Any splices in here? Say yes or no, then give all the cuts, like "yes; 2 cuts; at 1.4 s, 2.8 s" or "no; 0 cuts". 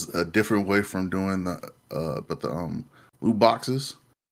yes; 1 cut; at 2.3 s